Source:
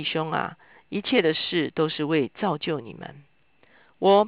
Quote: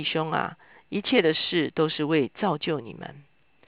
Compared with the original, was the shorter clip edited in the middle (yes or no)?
no